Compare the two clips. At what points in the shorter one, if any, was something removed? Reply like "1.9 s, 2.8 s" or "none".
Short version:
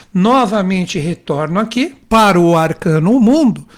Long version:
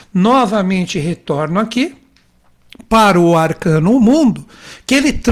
2.0 s